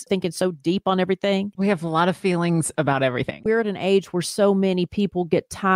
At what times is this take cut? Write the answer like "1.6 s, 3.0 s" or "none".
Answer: none